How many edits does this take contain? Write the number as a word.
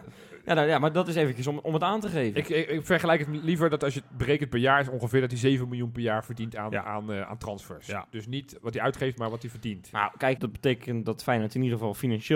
one